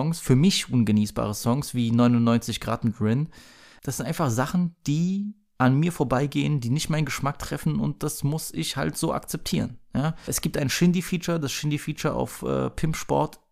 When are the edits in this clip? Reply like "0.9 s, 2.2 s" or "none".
none